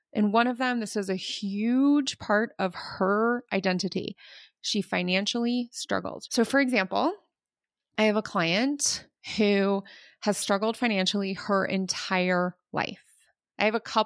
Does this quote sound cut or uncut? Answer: cut